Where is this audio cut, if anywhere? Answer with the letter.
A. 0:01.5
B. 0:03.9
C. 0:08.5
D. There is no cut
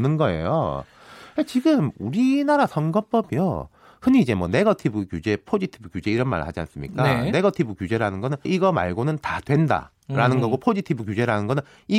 C